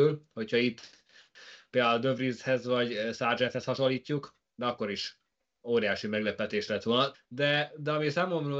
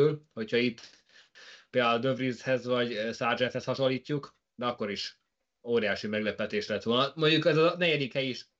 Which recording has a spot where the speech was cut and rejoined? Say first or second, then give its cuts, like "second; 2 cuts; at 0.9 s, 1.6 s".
first; 1 cut; at 7.1 s